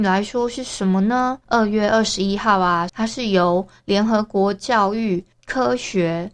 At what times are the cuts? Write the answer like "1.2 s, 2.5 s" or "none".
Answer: 1.4 s, 2.9 s

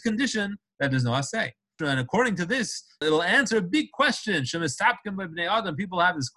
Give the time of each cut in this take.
1.8 s, 3.0 s

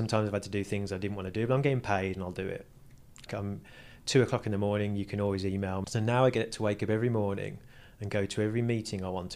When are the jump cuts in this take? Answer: 3.3 s, 5.8 s

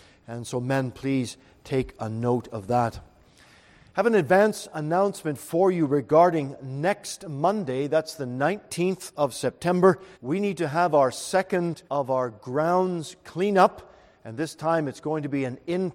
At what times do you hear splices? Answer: 10.1 s, 11.9 s

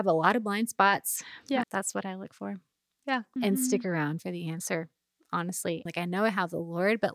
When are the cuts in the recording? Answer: 1.6 s, 3.4 s, 5.9 s

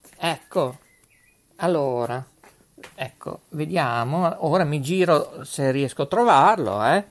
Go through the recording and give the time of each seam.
none

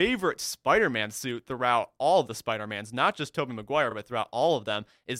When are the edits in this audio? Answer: none

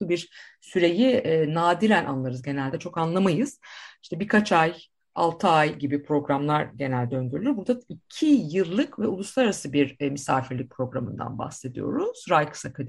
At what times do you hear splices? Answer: none

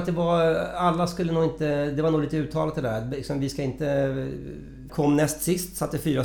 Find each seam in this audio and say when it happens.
4.9 s

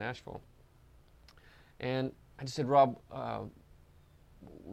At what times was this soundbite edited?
none

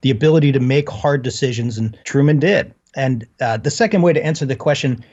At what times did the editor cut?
2.0 s

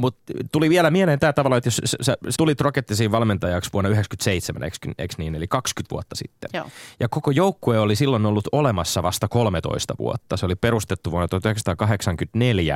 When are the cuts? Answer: 2.3 s

